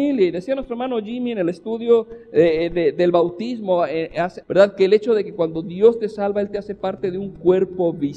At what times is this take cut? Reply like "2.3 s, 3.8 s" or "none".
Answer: 4.4 s